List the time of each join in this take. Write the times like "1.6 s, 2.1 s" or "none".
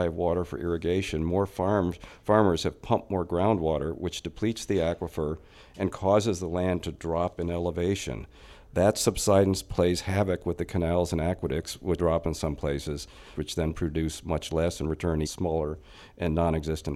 12.0 s, 13.4 s, 15.3 s

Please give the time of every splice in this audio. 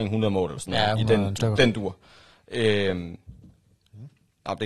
1.4 s

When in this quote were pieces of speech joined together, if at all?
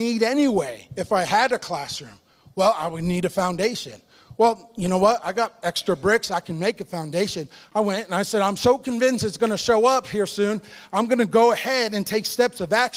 none

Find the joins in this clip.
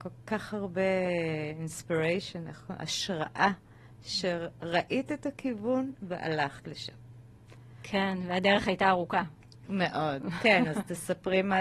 none

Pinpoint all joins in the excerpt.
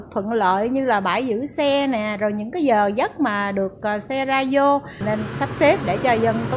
none

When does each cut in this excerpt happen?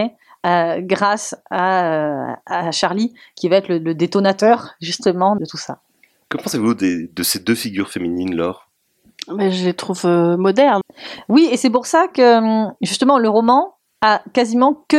5.4 s, 10.8 s

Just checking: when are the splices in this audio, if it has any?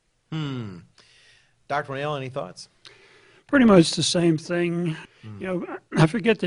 5.1 s

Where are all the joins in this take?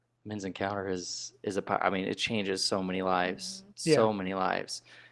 3.7 s

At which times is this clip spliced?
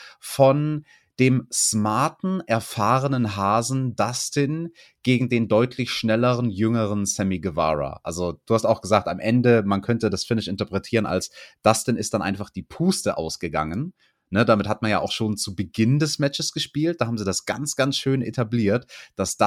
none

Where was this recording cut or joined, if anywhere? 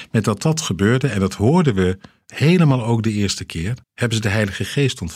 3.8 s

